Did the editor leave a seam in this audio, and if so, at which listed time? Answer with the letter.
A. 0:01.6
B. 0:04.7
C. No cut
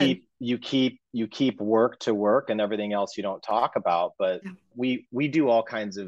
B